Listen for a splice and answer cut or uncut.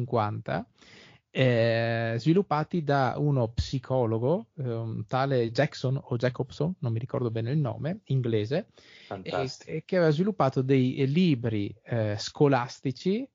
uncut